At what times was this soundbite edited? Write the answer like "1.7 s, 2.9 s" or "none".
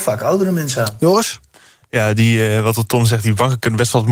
none